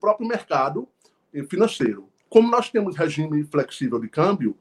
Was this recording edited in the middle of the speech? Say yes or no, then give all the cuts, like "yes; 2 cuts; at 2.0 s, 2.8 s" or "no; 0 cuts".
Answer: yes; 1 cut; at 2.3 s